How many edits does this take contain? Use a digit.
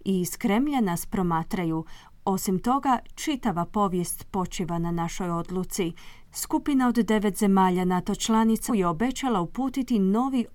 2